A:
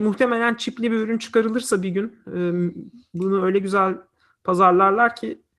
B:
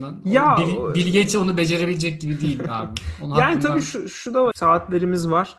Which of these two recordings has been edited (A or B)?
B